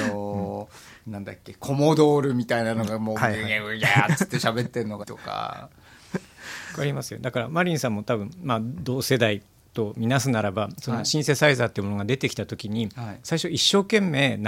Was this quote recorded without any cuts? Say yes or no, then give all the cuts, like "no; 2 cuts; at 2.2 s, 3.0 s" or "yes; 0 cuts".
no; 1 cut; at 5.0 s